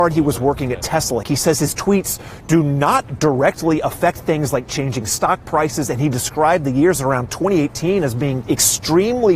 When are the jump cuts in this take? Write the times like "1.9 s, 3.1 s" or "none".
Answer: 1.2 s, 8.4 s